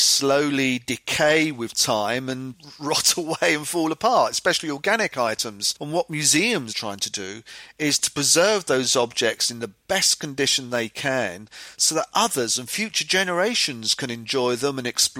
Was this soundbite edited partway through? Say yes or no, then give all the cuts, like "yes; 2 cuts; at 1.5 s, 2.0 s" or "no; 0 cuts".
yes; 1 cut; at 6.7 s